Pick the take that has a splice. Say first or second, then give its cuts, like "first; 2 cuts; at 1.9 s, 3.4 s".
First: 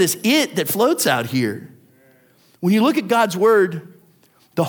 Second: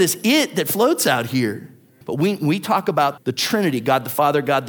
second; 2 cuts; at 2.0 s, 3.2 s